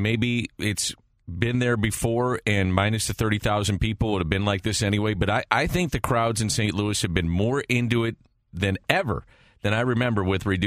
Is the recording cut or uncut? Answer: uncut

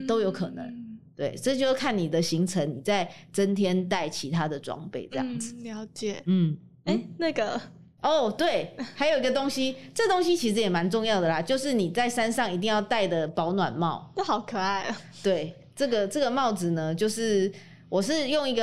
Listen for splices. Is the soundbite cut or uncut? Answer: uncut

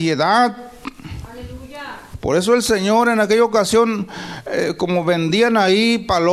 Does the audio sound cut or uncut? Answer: uncut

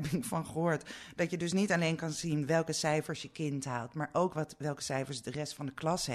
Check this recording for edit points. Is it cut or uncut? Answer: uncut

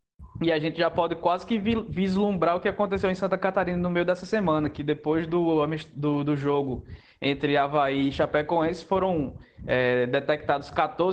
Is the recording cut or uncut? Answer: uncut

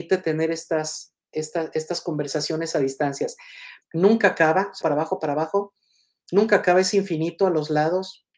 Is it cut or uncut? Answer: cut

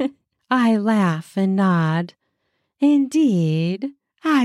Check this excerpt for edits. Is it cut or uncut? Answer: uncut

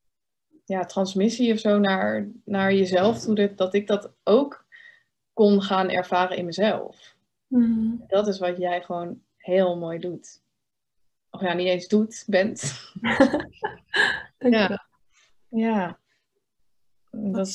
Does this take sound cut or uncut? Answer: uncut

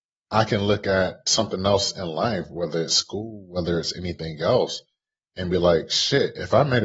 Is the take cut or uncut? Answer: uncut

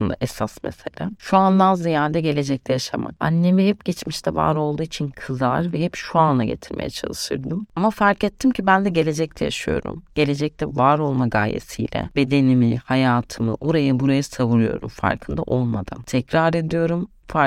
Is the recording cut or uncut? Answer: cut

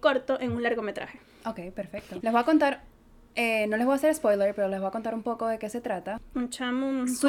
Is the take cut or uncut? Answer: cut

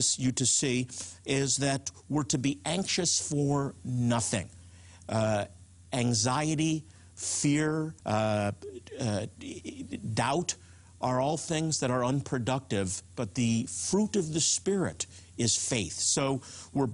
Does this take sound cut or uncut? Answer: cut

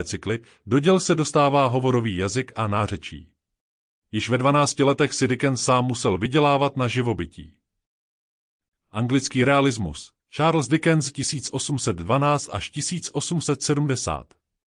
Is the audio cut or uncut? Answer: cut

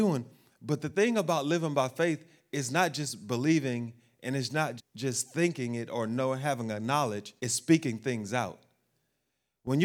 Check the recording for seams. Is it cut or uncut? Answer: cut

